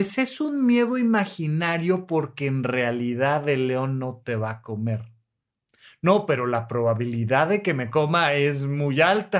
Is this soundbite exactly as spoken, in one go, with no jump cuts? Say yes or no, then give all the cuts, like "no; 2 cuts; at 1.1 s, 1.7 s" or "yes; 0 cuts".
yes; 0 cuts